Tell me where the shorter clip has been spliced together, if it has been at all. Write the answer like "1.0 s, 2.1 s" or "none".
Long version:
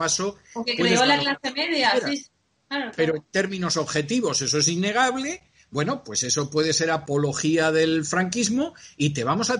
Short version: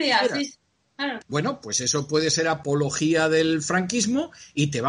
1.2 s